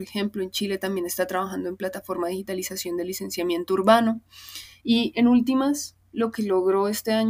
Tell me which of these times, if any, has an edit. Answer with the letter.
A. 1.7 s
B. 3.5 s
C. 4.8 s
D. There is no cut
C